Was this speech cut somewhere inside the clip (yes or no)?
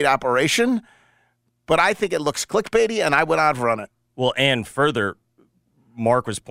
no